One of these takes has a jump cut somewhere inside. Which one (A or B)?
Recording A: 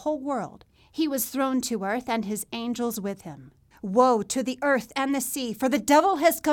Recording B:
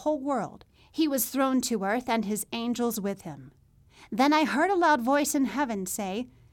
A